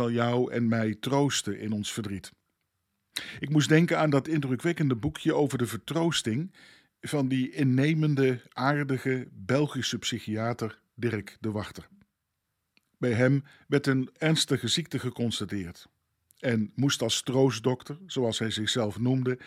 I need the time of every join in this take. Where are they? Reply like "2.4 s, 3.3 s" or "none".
none